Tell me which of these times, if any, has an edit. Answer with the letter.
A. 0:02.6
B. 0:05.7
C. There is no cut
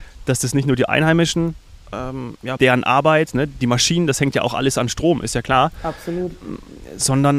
A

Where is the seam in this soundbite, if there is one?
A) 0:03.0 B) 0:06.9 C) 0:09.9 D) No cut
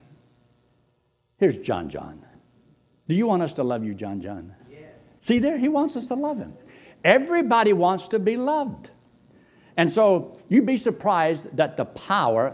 A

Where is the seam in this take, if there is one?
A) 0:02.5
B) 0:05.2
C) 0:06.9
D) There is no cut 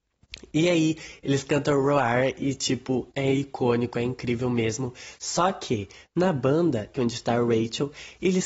C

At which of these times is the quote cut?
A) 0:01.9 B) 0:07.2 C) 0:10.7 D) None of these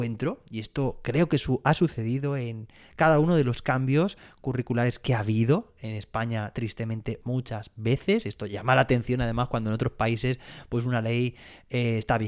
B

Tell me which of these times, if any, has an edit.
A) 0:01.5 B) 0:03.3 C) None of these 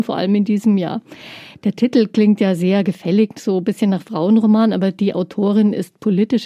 A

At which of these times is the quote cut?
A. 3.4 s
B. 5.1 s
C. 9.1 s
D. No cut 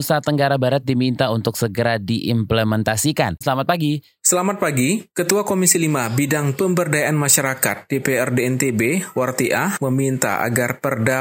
A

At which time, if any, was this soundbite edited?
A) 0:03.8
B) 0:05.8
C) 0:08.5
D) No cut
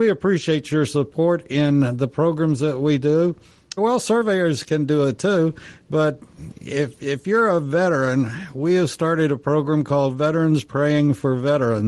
A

